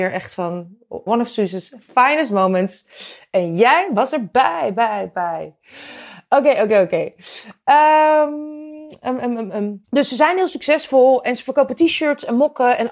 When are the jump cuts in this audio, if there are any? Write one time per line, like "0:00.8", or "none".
0:01.1
0:09.8